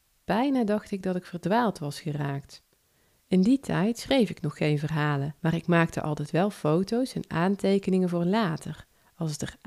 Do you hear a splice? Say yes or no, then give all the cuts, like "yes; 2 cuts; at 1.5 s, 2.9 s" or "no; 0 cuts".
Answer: yes; 2 cuts; at 3.1 s, 5.4 s